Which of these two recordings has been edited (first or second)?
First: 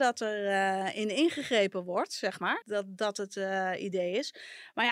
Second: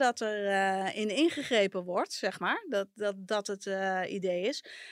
first